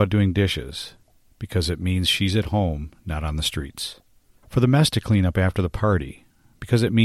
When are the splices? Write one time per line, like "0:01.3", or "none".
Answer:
0:04.4